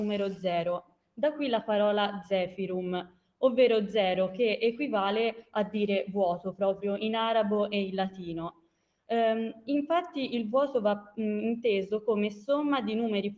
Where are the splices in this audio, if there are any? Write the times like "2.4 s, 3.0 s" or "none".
none